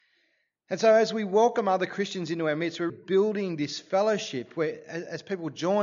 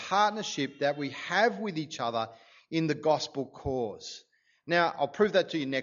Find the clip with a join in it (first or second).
first